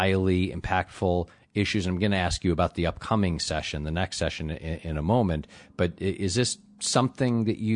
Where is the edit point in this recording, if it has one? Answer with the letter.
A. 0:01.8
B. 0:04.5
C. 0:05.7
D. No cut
D